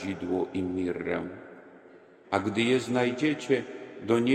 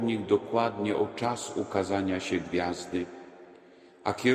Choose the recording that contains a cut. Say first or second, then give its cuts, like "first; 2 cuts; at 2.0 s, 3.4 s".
first; 1 cut; at 2.2 s